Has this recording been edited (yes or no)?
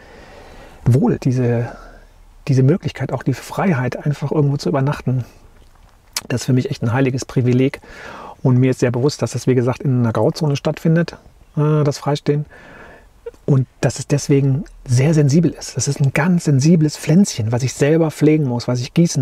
yes